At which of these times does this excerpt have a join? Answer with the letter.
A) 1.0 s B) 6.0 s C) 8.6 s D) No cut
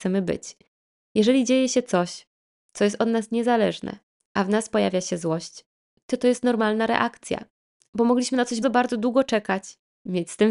C